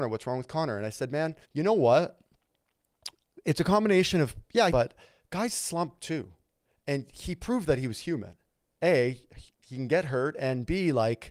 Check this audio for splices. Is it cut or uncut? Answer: cut